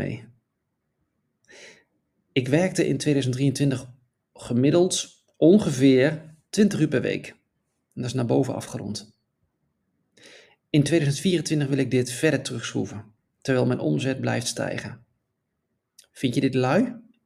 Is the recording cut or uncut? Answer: uncut